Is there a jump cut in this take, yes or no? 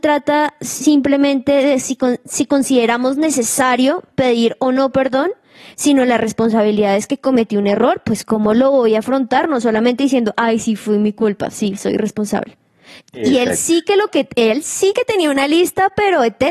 yes